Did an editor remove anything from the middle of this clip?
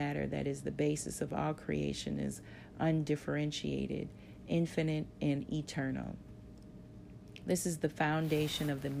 no; 0 cuts

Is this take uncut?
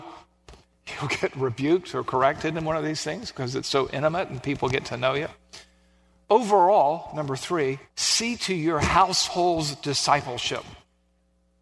no; 2 cuts; at 6.2 s, 7.9 s

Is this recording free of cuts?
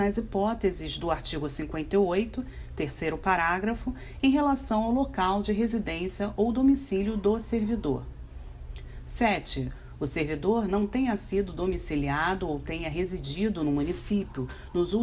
yes; 0 cuts

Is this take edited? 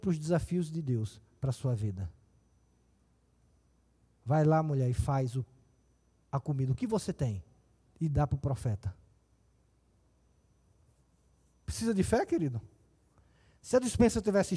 no; 0 cuts

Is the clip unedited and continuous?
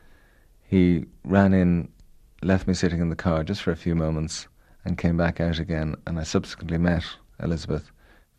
yes; 0 cuts

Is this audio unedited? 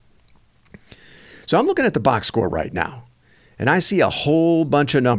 yes; 0 cuts

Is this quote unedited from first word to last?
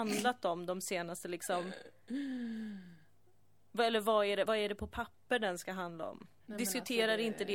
no; 2 cuts; at 4.5 s, 6.4 s

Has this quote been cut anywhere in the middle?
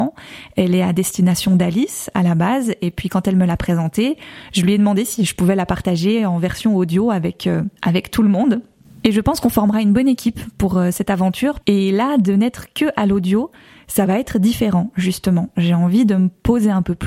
yes; 2 cuts; at 7.8 s, 11.6 s

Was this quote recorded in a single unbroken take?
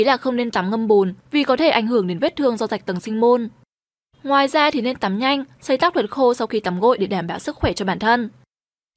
no; 1 cut; at 5.6 s

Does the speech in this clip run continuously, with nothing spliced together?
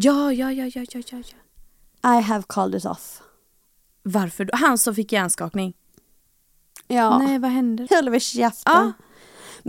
no; 1 cut; at 7.9 s

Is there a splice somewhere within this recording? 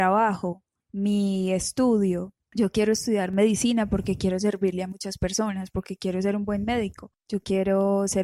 no; 0 cuts

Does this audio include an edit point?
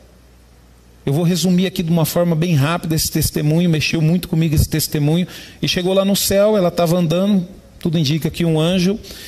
no; 0 cuts

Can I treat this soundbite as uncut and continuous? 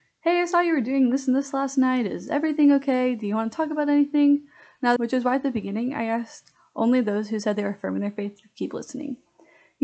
no; 1 cut; at 5.0 s

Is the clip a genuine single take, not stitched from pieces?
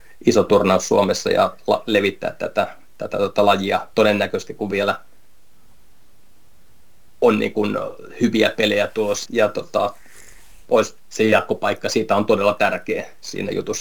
no; 1 cut; at 9.3 s

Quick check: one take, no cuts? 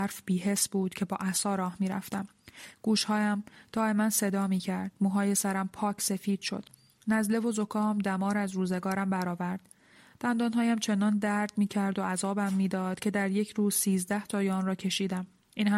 yes; 0 cuts

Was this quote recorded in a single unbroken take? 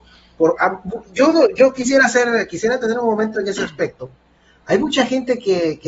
yes; 0 cuts

